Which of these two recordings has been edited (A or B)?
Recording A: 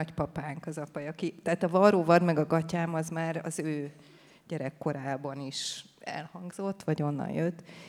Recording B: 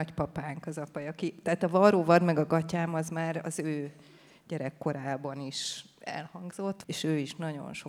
B